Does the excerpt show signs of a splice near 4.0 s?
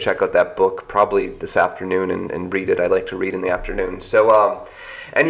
no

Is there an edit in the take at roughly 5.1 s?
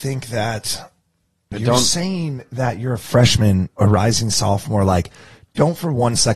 no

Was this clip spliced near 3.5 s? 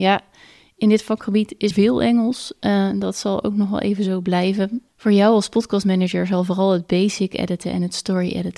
no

